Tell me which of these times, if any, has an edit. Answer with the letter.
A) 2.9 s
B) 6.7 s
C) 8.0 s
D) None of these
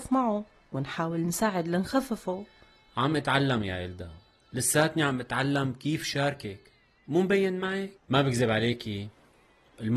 C